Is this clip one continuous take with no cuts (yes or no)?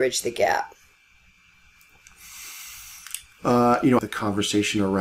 no